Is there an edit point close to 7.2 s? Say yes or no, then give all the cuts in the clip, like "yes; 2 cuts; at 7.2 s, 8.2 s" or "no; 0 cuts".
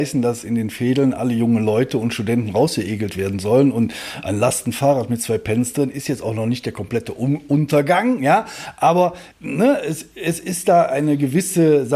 no; 1 cut; at 9.3 s